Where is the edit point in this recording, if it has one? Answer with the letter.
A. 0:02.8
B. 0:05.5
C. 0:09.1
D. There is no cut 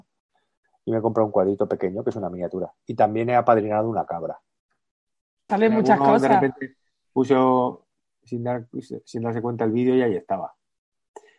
B